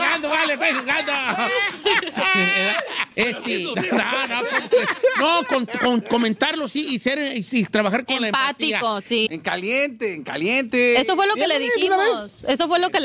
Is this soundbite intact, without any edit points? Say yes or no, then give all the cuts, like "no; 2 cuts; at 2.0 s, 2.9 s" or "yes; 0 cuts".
no; 2 cuts; at 3.7 s, 9.3 s